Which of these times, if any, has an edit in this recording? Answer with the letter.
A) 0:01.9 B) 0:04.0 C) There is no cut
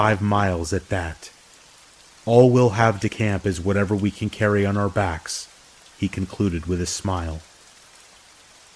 C